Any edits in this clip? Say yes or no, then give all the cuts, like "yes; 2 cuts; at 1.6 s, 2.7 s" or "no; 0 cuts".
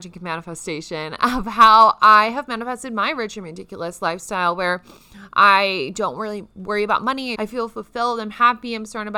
yes; 1 cut; at 7.4 s